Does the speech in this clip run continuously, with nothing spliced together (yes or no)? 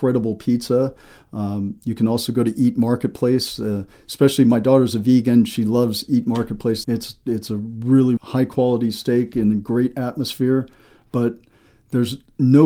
no